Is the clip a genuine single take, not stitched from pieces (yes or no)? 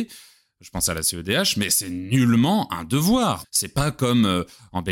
no